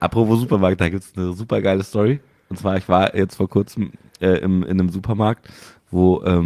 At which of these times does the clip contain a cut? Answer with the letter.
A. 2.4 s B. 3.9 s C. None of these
C